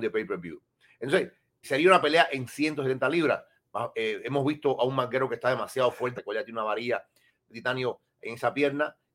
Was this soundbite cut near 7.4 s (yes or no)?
no